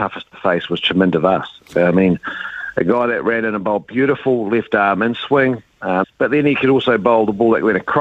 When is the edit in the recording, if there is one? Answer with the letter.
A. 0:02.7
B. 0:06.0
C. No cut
B